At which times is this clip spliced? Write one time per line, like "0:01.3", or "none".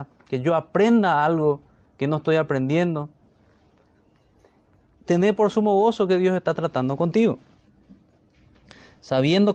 0:04.9